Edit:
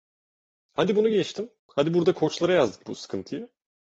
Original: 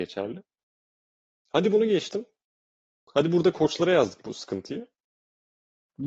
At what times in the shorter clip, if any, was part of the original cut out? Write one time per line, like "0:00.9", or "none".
0:01.6